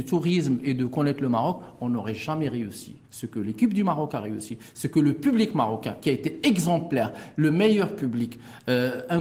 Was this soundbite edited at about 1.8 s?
no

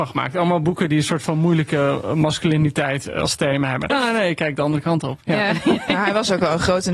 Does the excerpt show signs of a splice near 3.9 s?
yes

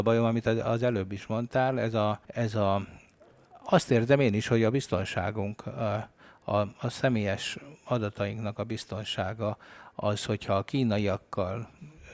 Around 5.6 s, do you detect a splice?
no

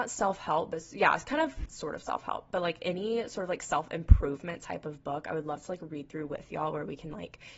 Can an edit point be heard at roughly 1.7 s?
yes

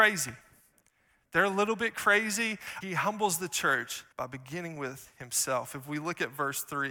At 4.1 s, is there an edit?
yes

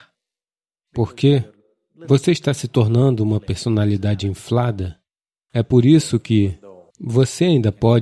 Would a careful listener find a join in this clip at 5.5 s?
yes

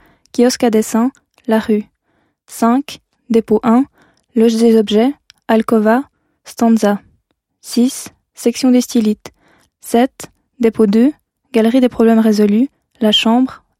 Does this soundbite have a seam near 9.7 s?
yes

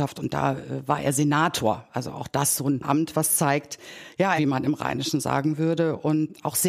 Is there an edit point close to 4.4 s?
yes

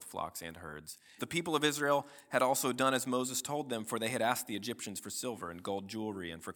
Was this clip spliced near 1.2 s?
yes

